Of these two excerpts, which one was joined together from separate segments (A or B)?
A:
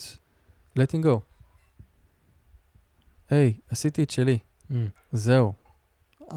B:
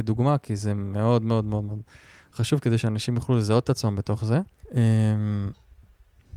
B